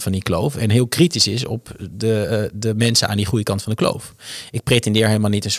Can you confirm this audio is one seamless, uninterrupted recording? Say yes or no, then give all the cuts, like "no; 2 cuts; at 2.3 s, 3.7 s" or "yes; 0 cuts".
yes; 0 cuts